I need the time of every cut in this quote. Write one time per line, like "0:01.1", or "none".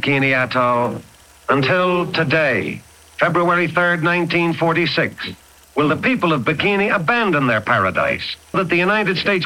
0:08.5